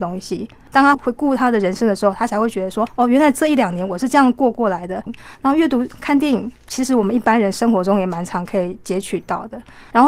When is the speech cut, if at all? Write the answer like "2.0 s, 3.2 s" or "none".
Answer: 0.9 s, 5.1 s

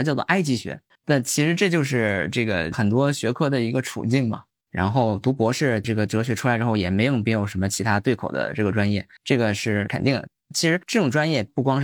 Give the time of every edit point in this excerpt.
0.9 s, 4.7 s, 9.2 s

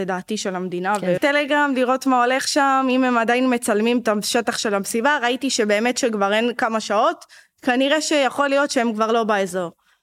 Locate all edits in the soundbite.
1.2 s

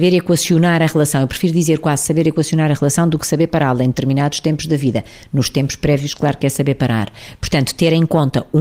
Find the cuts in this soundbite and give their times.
none

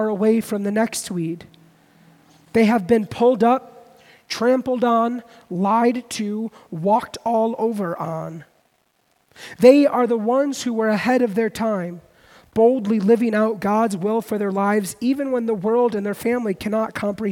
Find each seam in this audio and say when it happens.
none

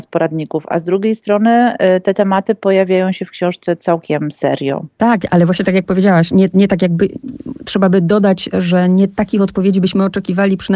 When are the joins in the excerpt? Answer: none

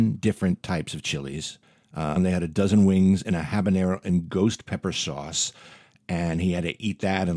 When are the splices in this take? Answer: 2.2 s

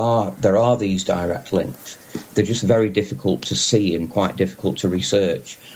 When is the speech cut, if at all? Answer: none

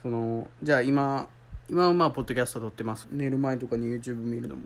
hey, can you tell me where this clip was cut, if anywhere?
3.0 s

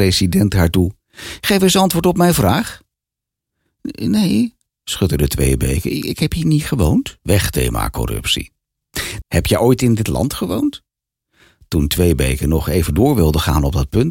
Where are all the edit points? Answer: 7.2 s, 9.2 s

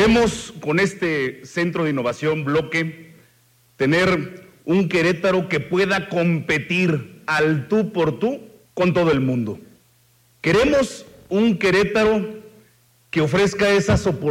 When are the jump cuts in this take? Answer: none

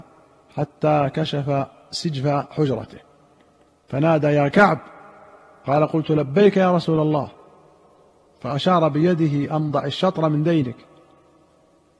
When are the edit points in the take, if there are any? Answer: none

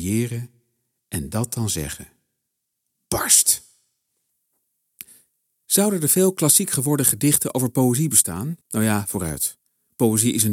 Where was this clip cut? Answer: 8.6 s

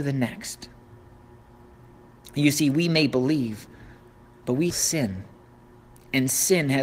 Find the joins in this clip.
4.7 s

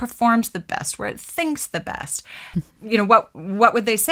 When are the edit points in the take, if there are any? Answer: 2.5 s

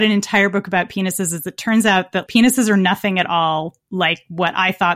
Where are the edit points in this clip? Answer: 2.3 s

